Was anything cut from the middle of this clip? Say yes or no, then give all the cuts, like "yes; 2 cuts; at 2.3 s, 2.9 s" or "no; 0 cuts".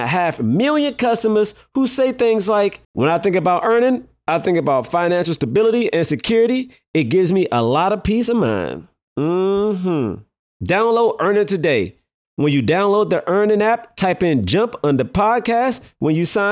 yes; 2 cuts; at 2.8 s, 12.2 s